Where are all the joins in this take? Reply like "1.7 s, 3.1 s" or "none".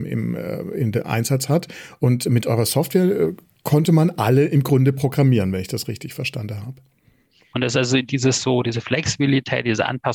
7.5 s